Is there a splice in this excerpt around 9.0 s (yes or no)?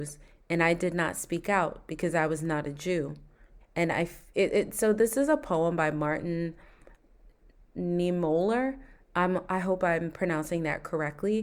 no